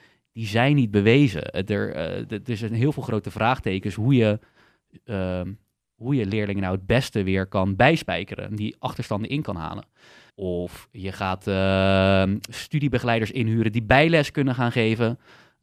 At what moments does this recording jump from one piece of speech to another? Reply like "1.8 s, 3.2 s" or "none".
10.3 s, 12.5 s